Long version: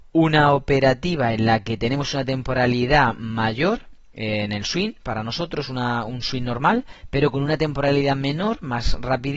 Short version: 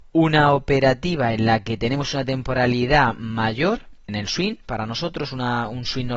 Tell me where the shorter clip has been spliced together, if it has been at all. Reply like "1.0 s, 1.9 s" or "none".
4.1 s